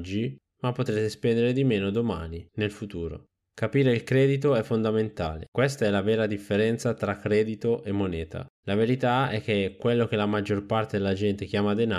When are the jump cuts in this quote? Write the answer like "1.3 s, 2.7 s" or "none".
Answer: none

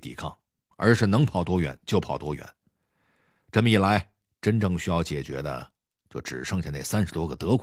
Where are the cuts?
none

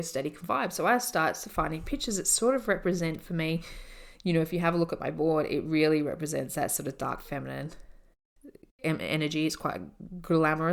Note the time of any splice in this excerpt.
none

